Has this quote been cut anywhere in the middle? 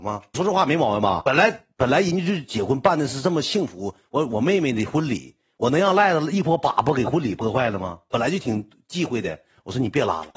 no; 0 cuts

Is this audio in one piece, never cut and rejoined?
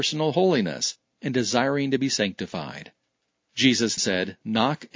no; 1 cut; at 4.0 s

